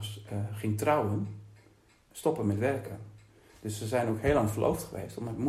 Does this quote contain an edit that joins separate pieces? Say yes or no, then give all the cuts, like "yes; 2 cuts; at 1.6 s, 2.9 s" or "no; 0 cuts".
no; 0 cuts